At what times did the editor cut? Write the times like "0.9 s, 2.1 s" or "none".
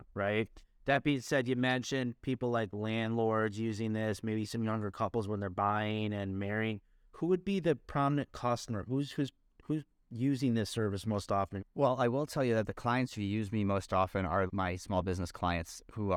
11.6 s, 14.5 s